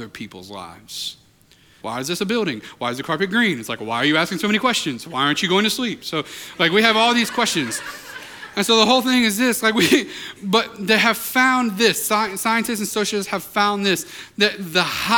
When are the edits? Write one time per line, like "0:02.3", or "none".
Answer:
0:01.8
0:10.4